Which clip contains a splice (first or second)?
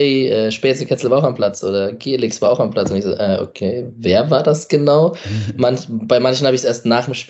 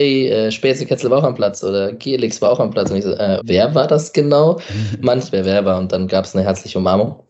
second